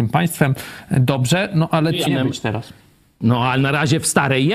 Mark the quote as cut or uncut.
cut